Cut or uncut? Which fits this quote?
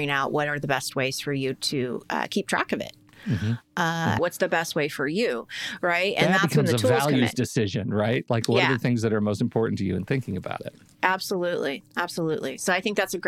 cut